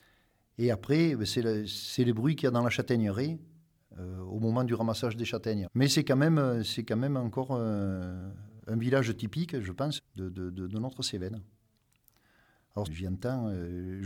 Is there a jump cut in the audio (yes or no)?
yes